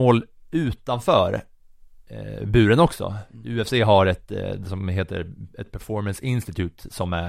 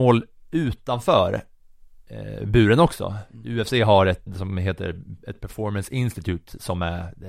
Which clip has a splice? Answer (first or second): second